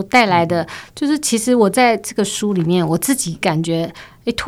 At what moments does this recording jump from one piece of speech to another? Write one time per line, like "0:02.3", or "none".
none